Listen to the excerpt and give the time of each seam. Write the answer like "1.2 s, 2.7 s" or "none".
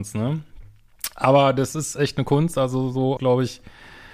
3.2 s